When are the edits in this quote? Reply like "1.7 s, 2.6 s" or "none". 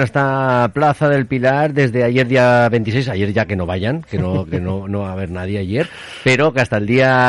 none